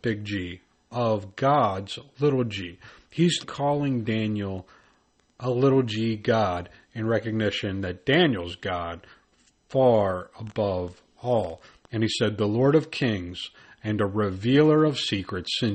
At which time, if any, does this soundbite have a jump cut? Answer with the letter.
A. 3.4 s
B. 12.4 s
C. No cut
A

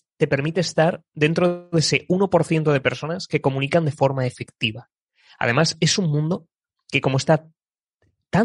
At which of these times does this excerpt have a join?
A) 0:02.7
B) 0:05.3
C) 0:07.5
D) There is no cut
D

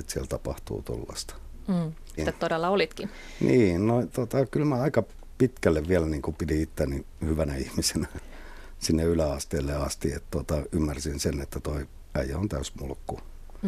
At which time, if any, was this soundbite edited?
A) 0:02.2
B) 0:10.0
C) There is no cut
A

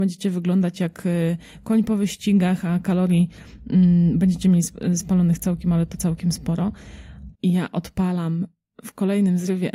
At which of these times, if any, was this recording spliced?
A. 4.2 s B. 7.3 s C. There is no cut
B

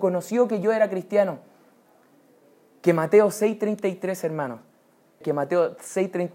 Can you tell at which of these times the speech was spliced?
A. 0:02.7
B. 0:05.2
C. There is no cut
B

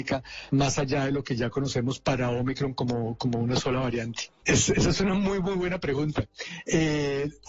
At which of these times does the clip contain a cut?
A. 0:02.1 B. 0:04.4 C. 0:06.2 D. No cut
B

